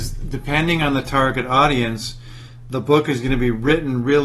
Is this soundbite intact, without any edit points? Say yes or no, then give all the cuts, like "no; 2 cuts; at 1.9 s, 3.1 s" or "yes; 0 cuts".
yes; 0 cuts